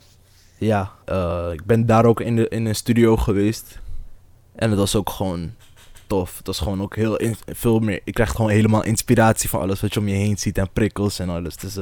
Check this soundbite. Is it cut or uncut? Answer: cut